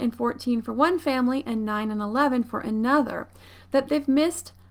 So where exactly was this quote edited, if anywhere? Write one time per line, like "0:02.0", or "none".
none